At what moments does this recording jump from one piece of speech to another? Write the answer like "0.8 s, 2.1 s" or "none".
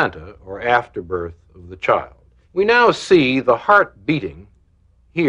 2.4 s